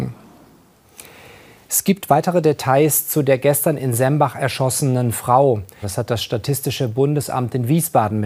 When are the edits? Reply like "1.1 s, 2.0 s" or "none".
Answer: 5.8 s